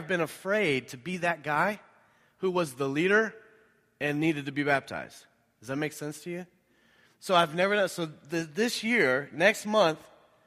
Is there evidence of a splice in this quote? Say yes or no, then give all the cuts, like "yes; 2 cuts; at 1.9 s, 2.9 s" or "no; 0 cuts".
no; 0 cuts